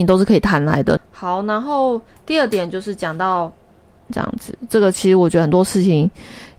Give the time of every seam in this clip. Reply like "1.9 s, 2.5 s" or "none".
1.0 s, 4.1 s